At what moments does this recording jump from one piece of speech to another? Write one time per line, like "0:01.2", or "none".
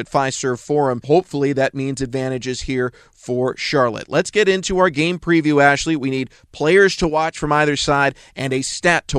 none